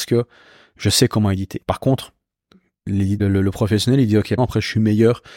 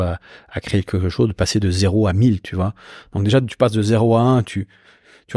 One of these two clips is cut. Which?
first; 3 cuts; at 1.6 s, 3.2 s, 4.4 s

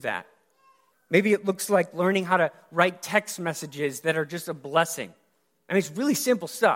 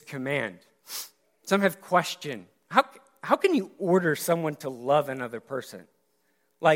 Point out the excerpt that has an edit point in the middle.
first; 1 cut; at 0.9 s

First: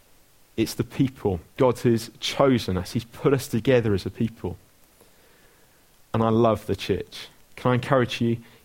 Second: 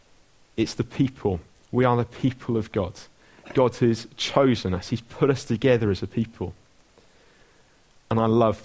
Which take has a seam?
first; 1 cut; at 1.6 s

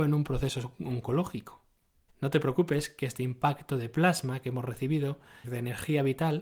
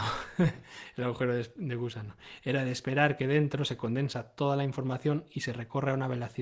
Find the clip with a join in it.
first; 2 cuts; at 2.1 s, 5.4 s

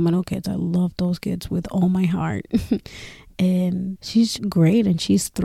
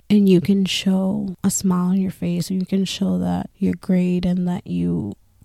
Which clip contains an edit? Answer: first; 1 cut; at 4.4 s

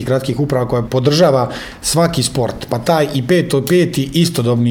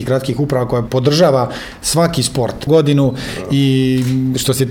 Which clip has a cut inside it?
second; 1 cut; at 2.7 s

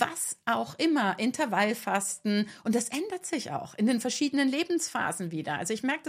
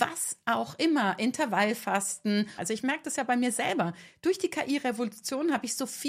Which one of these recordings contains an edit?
second; 1 cut; at 2.6 s

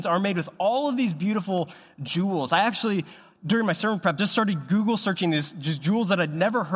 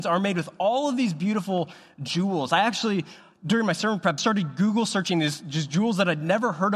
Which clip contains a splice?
second; 1 cut; at 4.2 s

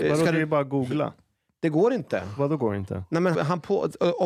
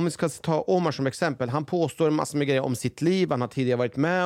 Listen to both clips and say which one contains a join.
first; 1 cut; at 3.3 s

